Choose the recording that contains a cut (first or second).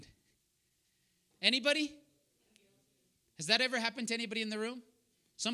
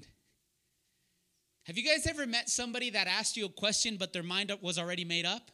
first